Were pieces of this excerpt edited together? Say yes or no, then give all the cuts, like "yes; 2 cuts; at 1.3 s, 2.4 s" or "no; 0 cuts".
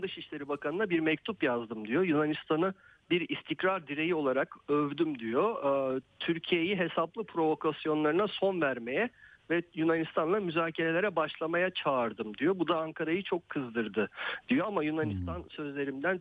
no; 0 cuts